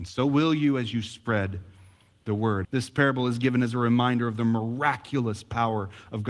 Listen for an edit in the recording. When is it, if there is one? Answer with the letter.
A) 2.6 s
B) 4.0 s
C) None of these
A